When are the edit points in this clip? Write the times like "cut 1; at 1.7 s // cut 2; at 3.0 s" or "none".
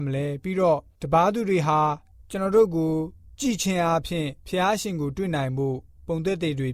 cut 1; at 4.4 s